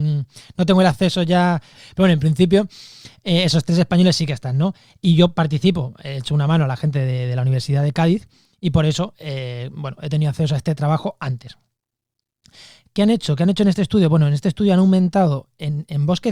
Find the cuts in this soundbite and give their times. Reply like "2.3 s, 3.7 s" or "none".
1.7 s